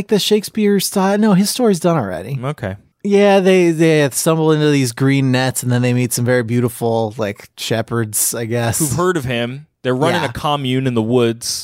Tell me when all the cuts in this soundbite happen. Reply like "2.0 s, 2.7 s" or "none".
2.9 s, 9.7 s

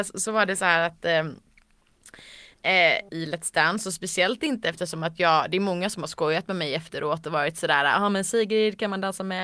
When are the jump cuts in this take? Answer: 3.1 s

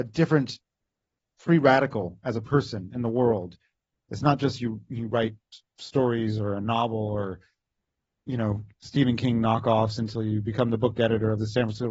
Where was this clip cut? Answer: none

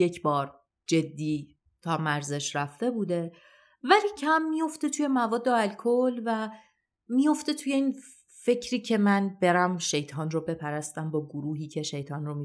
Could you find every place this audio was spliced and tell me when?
4.2 s

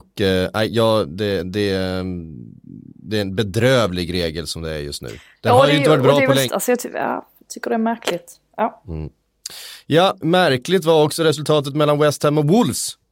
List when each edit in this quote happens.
6.5 s, 10.2 s

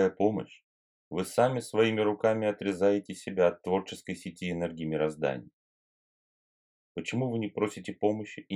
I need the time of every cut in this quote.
1.0 s, 6.8 s

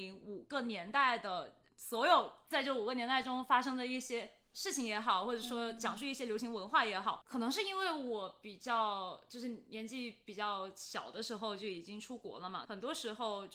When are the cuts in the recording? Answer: 7.2 s, 12.6 s

